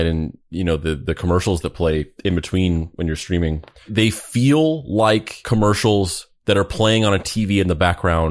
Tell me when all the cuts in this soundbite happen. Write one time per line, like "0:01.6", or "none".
0:02.2